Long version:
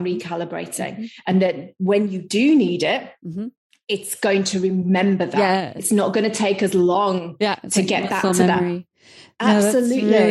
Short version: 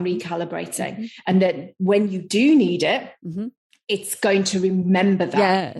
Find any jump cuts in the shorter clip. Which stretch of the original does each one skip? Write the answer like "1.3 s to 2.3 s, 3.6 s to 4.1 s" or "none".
none